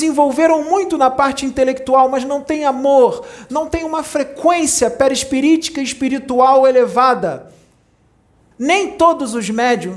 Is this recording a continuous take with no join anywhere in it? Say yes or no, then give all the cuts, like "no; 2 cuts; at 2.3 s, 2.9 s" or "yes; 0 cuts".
no; 2 cuts; at 3.5 s, 8.5 s